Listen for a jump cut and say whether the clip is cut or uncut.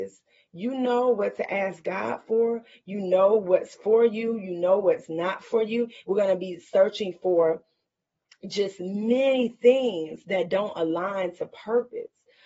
cut